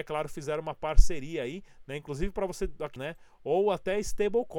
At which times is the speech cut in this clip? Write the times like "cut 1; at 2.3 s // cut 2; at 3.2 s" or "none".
cut 1; at 3.0 s